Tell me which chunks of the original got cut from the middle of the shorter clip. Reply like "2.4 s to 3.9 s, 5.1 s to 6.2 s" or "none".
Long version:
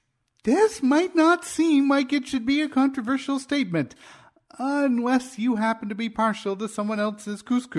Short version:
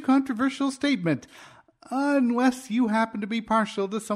none

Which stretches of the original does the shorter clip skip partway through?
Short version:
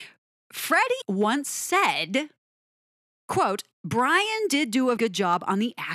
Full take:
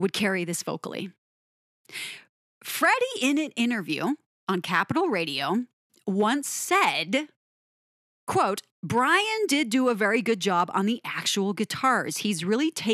3.1 s to 6.0 s, 10.0 s to 10.2 s

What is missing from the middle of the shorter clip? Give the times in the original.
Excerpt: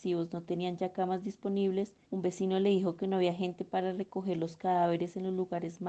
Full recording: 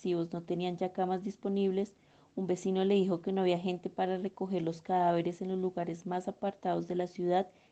2.0 s to 2.3 s

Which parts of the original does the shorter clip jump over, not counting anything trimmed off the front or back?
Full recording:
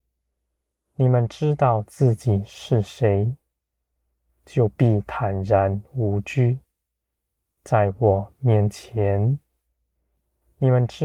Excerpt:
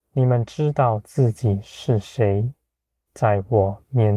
3.9 s to 7.6 s

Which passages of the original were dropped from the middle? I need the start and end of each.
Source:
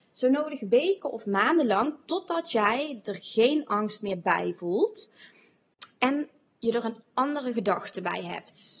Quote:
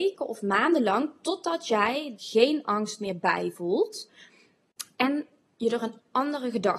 3.0 s to 3.2 s

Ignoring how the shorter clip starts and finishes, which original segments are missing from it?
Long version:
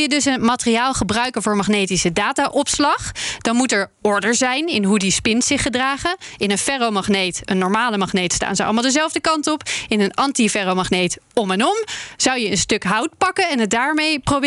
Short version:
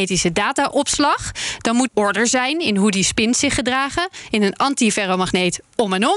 3.7 s to 3.9 s, 6.4 s to 9.9 s

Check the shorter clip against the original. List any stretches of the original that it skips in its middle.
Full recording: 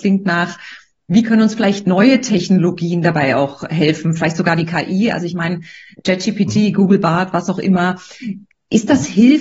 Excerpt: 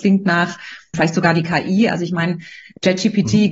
0.9 s to 4.2 s

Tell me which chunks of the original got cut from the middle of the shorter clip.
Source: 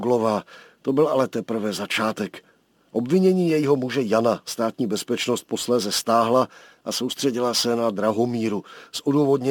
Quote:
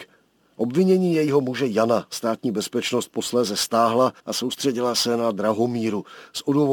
6.5 s to 6.8 s

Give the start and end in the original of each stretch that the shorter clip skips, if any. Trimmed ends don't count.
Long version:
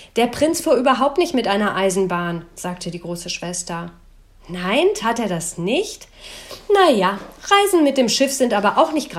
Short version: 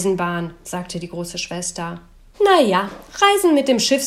4.2 s to 6.6 s

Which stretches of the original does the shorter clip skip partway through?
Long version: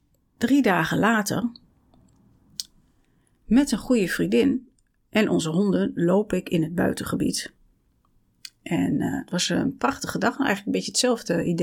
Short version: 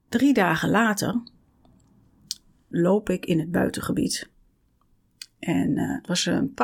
3.0 s to 5.9 s

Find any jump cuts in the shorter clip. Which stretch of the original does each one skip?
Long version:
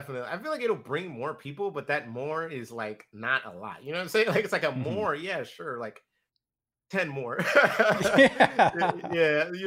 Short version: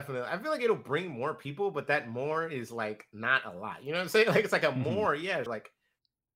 5.5 s to 5.8 s

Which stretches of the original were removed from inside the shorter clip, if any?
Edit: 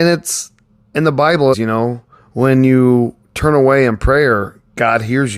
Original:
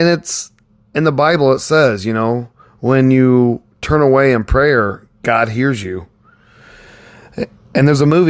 1.5 s to 2.0 s

